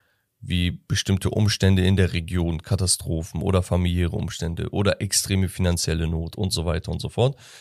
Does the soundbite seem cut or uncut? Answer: uncut